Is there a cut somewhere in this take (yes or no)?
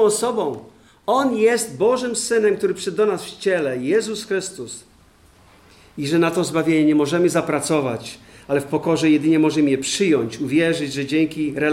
no